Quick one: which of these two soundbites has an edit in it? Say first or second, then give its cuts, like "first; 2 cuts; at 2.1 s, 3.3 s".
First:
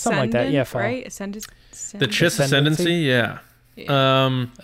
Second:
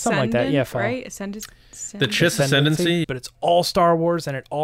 second; 1 cut; at 3.0 s